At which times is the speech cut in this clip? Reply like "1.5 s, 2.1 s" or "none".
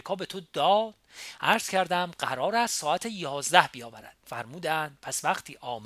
4.2 s